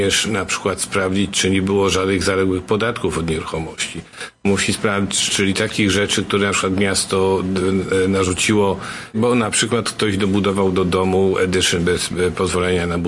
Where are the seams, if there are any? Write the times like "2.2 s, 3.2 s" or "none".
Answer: 5.3 s, 9.1 s